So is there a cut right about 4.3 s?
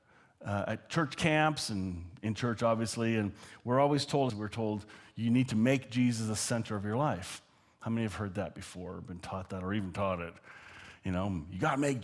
yes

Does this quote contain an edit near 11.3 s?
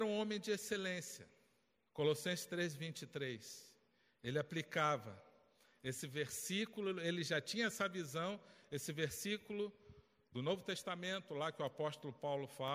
no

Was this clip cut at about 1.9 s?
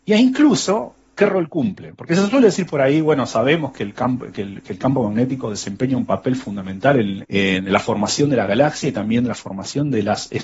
no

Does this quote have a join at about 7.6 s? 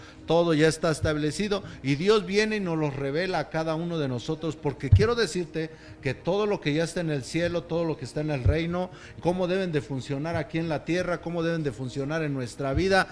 no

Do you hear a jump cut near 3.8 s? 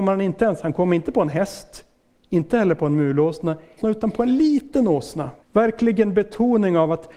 yes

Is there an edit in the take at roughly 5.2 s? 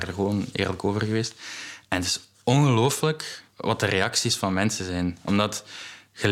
no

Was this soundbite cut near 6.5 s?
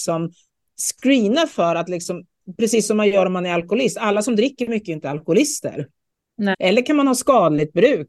yes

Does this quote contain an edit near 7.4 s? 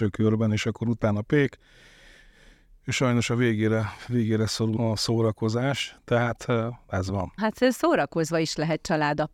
yes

